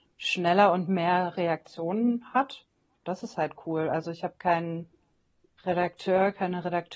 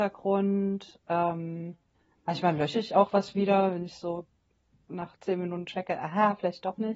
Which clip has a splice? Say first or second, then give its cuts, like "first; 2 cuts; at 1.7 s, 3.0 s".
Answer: first; 1 cut; at 3.0 s